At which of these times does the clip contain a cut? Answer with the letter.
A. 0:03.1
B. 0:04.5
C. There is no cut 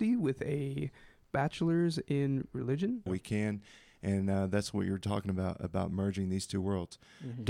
A